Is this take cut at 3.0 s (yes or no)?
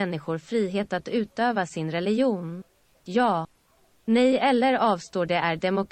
yes